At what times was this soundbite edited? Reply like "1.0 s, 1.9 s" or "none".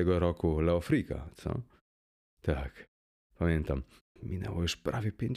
4.2 s